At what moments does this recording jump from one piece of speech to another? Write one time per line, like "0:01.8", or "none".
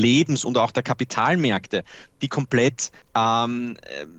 0:03.0